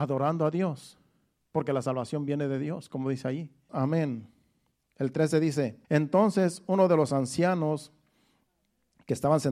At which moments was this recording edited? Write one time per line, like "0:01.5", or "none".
0:03.7
0:05.8